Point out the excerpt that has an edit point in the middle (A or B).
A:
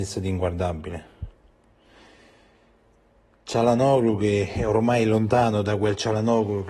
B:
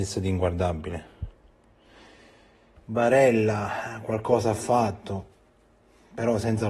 B